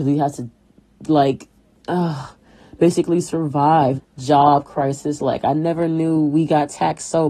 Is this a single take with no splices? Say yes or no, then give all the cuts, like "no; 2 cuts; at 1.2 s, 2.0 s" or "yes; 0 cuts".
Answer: no; 1 cut; at 4.0 s